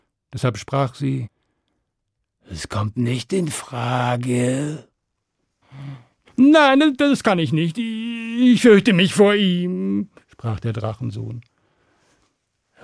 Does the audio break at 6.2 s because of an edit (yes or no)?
yes